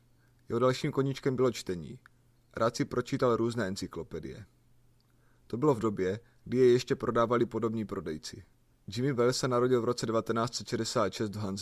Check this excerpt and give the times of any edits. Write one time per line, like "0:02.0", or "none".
0:02.4
0:08.7